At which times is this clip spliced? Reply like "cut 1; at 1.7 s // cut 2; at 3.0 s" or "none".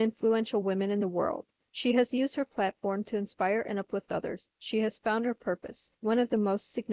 cut 1; at 4.5 s // cut 2; at 6.0 s